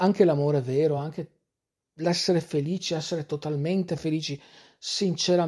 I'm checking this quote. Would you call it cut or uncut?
uncut